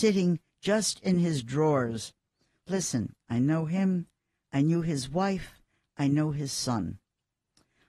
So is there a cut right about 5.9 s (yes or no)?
no